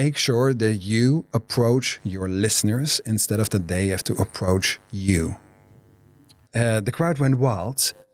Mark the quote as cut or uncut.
cut